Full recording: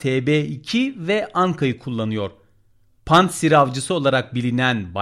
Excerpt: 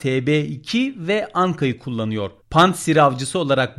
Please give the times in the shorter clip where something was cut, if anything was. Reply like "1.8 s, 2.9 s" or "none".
2.4 s